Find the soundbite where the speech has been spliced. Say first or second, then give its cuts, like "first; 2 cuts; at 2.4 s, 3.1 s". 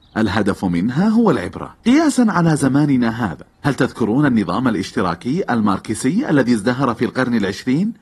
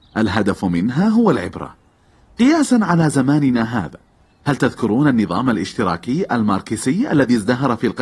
first; 2 cuts; at 1.8 s, 3.5 s